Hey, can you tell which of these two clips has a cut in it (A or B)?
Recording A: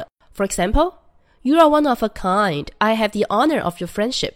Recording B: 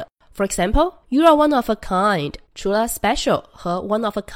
B